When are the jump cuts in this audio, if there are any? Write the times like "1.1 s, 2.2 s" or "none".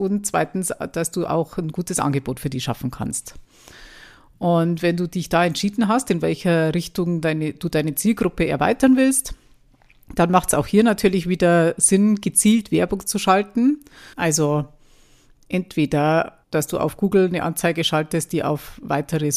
14.1 s, 16.4 s

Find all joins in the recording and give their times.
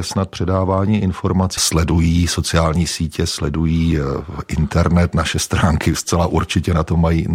1.6 s

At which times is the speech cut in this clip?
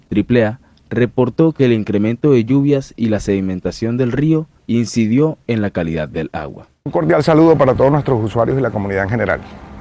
none

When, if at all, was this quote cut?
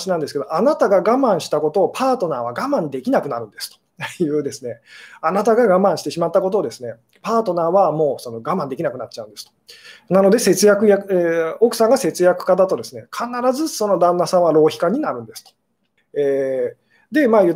16.0 s

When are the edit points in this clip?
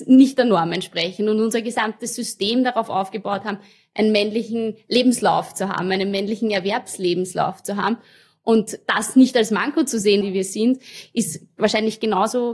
10.2 s

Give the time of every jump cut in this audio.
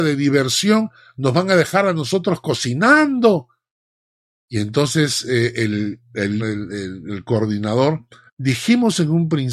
6.4 s, 8.3 s

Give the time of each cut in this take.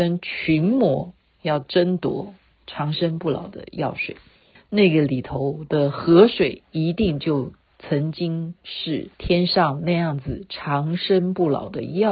4.5 s, 9.1 s

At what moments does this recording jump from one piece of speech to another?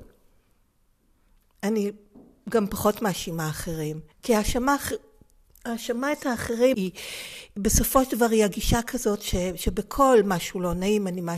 4.1 s, 6.7 s

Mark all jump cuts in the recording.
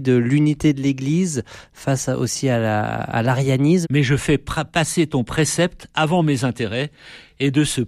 3.8 s

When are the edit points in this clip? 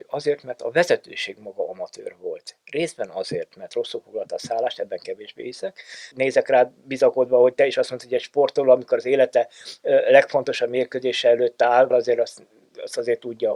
6.1 s, 11.9 s

